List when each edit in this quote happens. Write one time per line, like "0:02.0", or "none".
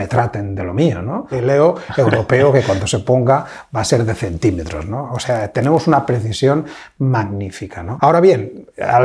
0:01.3
0:08.0